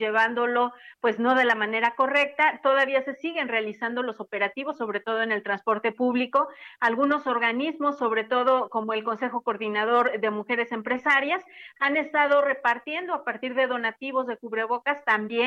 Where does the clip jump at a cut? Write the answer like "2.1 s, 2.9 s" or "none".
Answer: none